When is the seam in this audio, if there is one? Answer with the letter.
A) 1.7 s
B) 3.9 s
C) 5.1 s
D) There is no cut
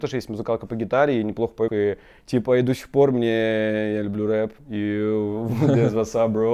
A